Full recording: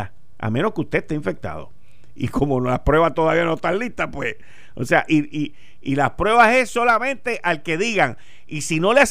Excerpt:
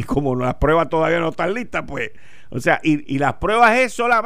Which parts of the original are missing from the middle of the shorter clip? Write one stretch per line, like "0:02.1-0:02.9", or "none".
0:05.3-0:05.8